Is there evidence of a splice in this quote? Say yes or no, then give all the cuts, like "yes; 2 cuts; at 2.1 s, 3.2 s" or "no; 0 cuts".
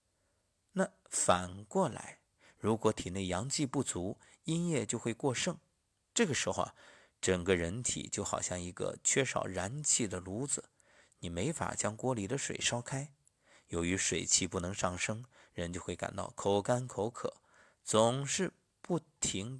no; 0 cuts